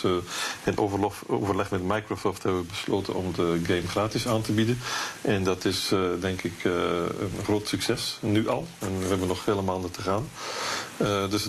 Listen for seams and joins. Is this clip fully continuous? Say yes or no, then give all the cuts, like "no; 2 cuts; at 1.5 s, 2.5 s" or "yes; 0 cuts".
yes; 0 cuts